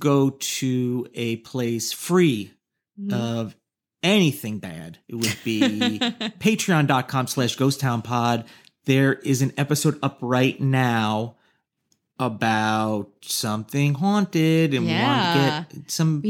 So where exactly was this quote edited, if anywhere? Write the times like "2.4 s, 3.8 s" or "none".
5.0 s